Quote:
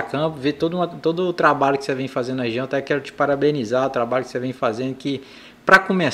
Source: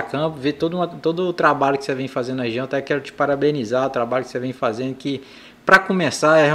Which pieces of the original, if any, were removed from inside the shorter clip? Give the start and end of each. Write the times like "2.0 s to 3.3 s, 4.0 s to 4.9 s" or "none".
none